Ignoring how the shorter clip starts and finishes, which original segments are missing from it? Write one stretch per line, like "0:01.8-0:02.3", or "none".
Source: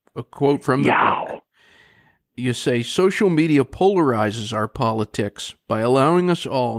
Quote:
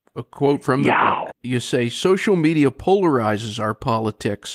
0:01.3-0:02.2